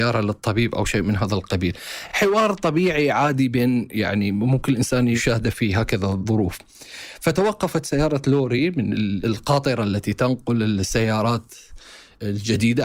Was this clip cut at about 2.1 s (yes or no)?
no